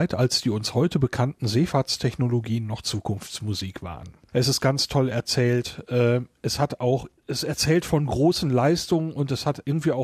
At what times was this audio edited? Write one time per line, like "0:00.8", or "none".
0:04.3
0:07.2